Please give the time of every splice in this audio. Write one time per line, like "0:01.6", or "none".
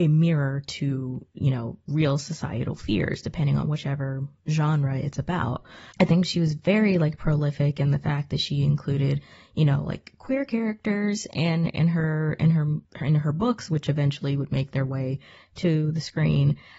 0:05.9
0:12.8